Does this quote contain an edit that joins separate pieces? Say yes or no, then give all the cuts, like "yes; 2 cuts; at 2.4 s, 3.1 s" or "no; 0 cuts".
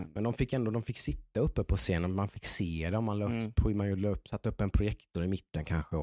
no; 0 cuts